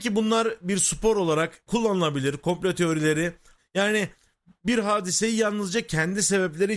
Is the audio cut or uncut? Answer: cut